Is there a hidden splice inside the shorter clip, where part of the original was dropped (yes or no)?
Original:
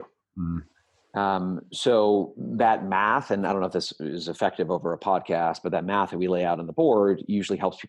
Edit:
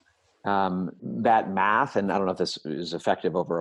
yes